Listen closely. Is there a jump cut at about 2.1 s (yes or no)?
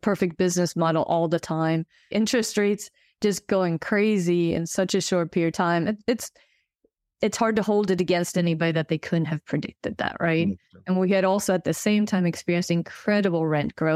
yes